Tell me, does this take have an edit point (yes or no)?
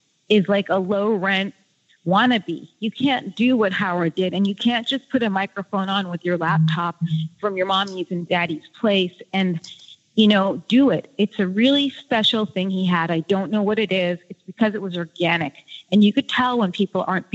no